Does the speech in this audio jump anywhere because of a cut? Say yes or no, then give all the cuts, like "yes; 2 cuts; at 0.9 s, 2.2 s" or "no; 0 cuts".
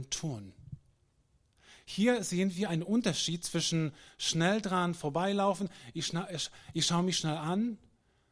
no; 0 cuts